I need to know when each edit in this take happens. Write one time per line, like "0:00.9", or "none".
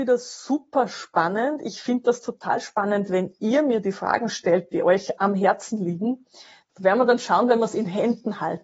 0:05.2
0:06.7